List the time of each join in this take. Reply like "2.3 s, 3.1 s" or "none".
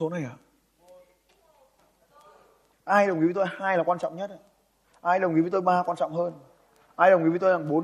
1.8 s